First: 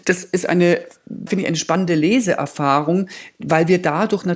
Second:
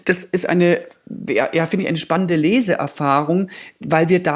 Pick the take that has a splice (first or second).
first